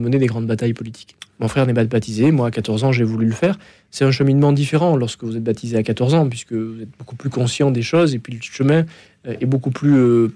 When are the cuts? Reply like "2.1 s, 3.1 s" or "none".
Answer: 1.3 s